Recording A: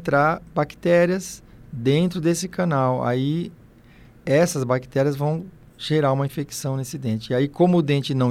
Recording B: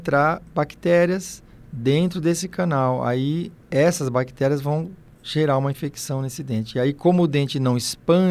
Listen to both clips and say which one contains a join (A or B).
B